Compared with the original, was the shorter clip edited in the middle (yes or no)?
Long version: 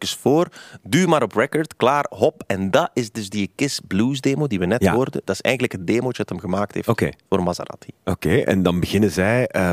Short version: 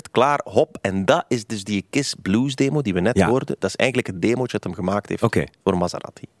no